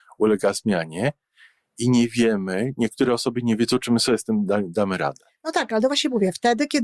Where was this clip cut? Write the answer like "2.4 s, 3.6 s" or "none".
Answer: none